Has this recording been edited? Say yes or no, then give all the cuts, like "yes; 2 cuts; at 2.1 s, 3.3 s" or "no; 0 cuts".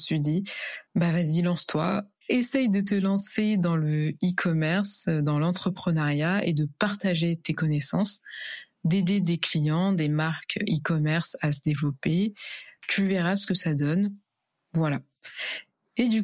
no; 0 cuts